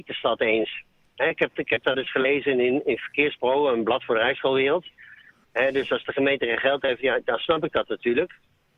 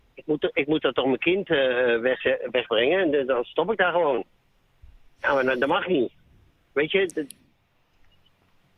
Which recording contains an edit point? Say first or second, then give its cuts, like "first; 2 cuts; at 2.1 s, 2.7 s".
first; 1 cut; at 5.4 s